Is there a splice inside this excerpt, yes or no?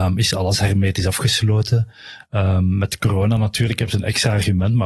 no